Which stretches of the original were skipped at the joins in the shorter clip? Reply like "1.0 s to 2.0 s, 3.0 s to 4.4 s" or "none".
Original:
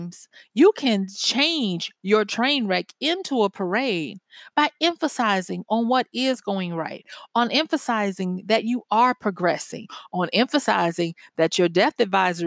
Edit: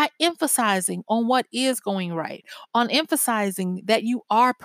none